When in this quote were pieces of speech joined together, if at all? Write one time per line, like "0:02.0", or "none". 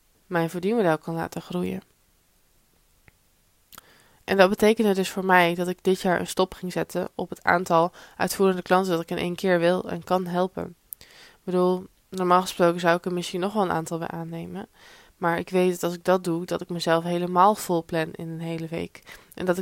none